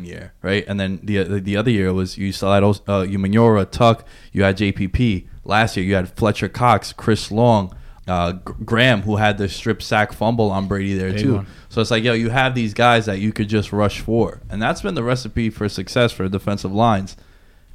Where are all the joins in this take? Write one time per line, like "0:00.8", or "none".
0:08.0

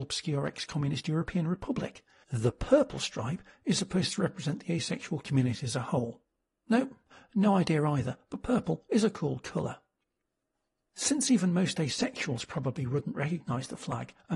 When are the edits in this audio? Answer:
0:02.2

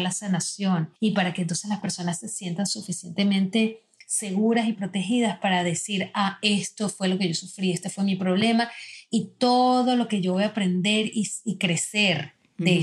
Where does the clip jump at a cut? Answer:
0:01.0

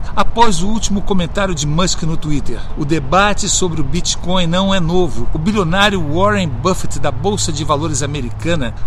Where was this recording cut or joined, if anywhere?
none

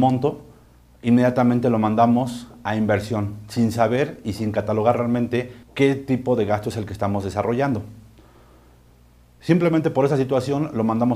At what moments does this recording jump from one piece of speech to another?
0:05.6

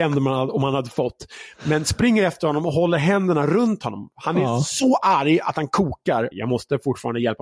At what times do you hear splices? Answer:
0:06.3

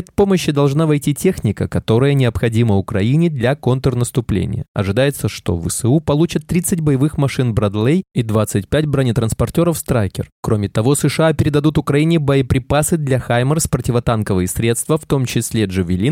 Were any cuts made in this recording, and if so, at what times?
none

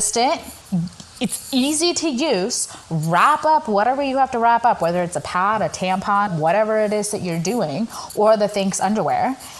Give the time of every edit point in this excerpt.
0:06.3

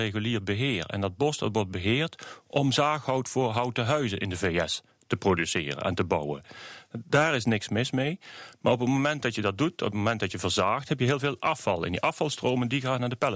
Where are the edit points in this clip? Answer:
none

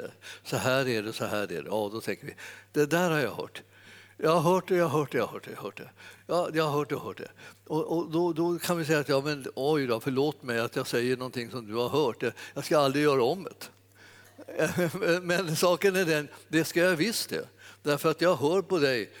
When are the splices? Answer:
none

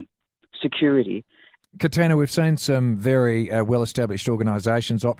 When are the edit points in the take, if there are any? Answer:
0:01.6

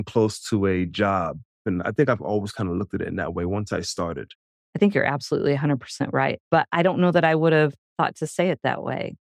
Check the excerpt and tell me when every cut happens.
none

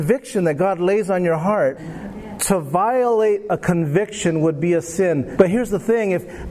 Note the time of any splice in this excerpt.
0:01.8
0:05.4

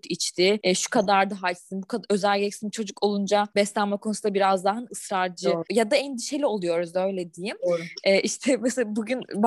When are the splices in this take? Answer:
none

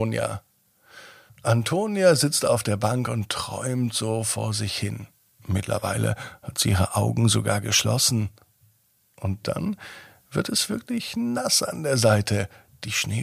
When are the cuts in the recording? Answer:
none

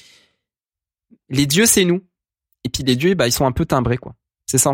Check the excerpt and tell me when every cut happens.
none

